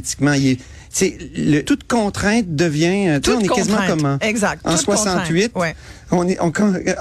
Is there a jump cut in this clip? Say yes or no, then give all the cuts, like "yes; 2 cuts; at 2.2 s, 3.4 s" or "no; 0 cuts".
yes; 1 cut; at 1.6 s